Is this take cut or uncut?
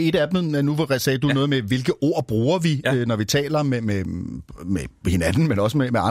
uncut